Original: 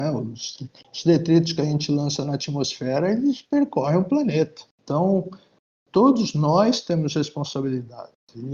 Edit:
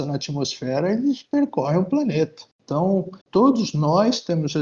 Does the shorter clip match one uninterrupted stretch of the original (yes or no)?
no